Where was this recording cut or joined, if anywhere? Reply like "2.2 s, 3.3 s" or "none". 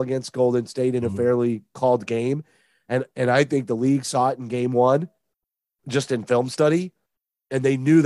none